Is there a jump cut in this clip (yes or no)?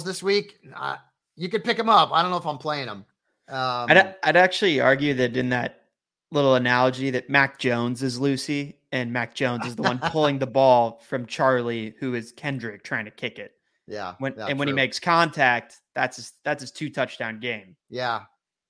yes